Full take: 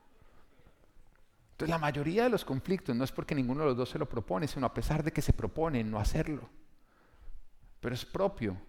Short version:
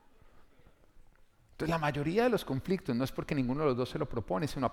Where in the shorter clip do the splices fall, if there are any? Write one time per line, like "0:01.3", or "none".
none